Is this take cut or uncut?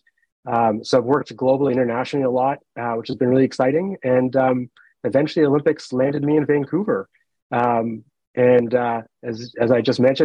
uncut